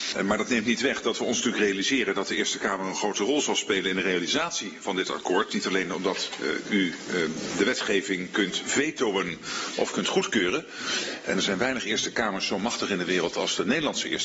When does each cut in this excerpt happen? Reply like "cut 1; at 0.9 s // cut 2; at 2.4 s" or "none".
none